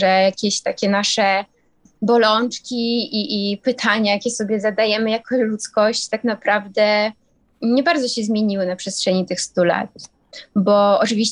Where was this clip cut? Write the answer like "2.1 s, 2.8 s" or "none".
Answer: none

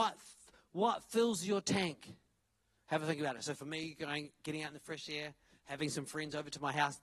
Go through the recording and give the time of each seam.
none

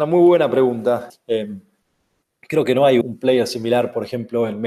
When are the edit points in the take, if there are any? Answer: 1.1 s, 3.0 s

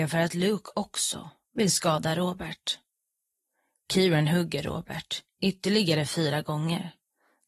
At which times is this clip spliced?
none

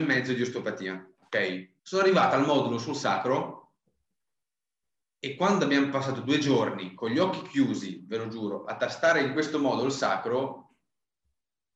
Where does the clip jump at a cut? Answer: 1.8 s

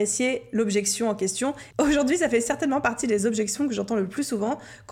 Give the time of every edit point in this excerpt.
1.7 s

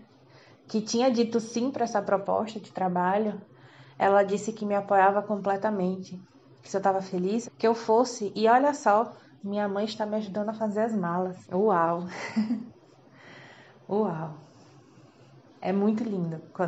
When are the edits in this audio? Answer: 7.4 s, 11.4 s

